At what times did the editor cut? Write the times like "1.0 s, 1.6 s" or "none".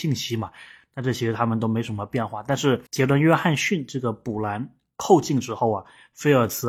2.9 s